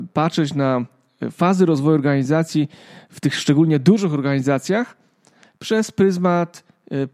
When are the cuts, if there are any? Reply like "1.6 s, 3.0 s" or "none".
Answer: none